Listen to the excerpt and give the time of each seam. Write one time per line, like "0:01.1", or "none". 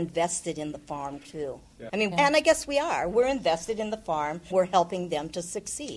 0:02.1
0:04.5